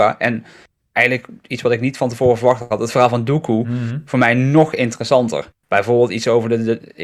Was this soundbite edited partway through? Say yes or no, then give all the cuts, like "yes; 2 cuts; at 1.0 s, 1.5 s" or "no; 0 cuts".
yes; 1 cut; at 5.5 s